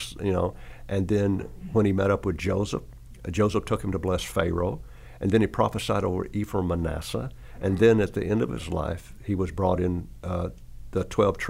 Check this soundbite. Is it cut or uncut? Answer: uncut